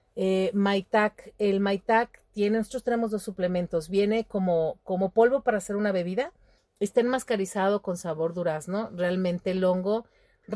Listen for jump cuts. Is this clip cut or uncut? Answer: cut